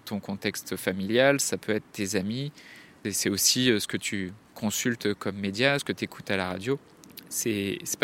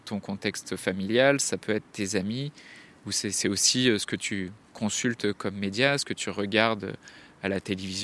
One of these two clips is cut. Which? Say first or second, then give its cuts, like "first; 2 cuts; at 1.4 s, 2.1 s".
first; 2 cuts; at 3.0 s, 5.8 s